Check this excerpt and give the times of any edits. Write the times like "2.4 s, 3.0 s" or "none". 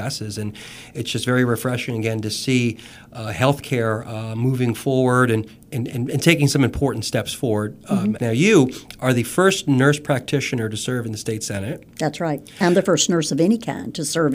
8.2 s